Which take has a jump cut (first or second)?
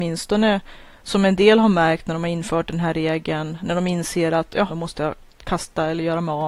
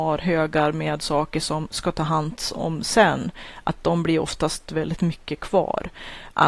first